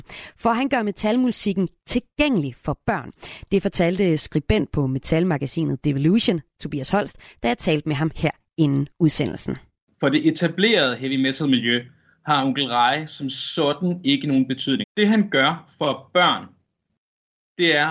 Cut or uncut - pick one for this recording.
cut